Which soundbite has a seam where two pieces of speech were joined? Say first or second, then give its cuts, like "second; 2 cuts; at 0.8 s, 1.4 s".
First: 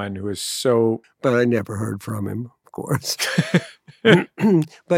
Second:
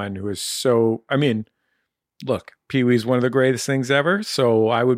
first; 1 cut; at 1.0 s